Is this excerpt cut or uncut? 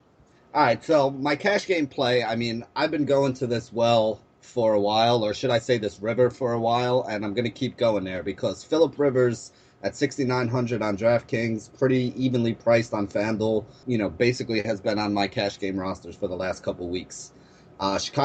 cut